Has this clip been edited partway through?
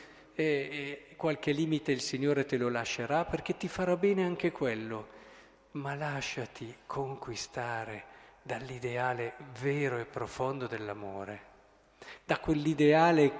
no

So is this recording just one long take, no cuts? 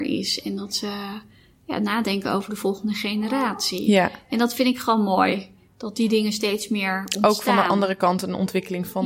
yes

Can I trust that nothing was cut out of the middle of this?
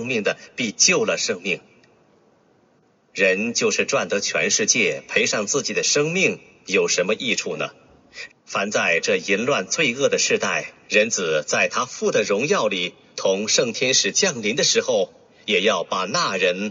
no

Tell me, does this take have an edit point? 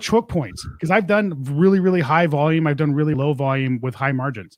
yes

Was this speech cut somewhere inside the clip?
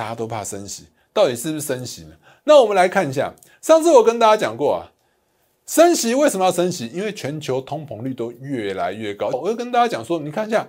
yes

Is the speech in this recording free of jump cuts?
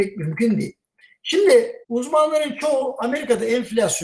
no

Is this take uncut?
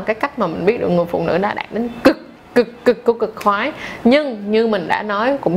yes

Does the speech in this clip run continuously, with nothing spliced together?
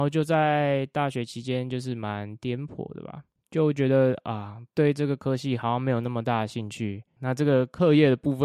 no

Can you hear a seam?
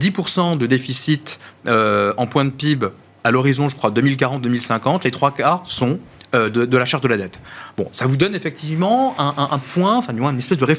no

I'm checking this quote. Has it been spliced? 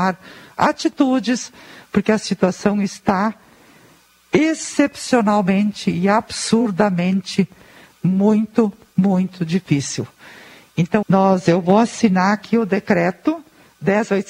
yes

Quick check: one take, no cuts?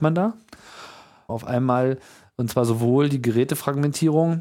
no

